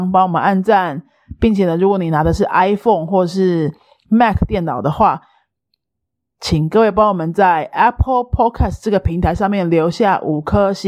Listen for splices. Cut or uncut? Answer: uncut